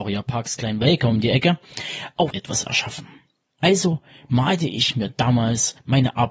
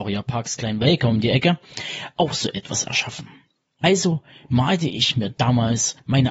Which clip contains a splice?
first; 1 cut; at 2.3 s

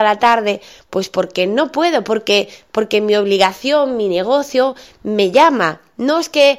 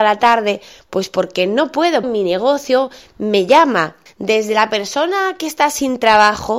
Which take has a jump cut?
second; 2 cuts; at 2.0 s, 4.1 s

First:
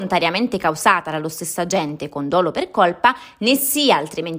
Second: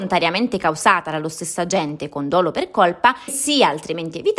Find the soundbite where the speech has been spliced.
second; 1 cut; at 3.3 s

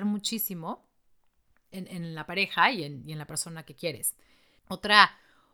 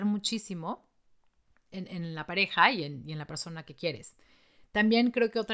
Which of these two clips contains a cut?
first; 1 cut; at 4.6 s

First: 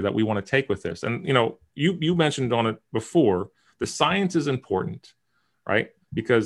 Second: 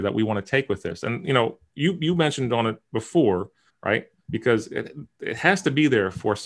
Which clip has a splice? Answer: second; 1 cut; at 3.7 s

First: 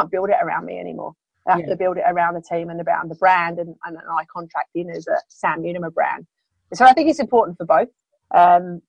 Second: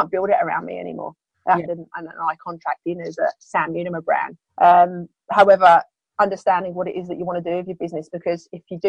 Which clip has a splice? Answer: second; 2 cuts; at 1.7 s, 4.5 s

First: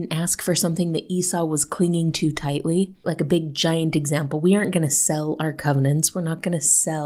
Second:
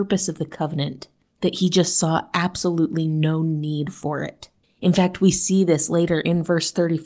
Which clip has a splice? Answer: first; 1 cut; at 3.0 s

